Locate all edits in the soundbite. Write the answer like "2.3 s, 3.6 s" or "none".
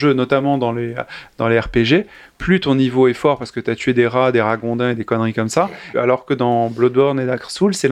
5.9 s